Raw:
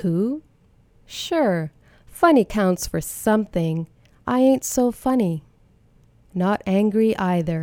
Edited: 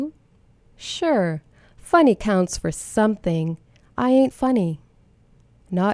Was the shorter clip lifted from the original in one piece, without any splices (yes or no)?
no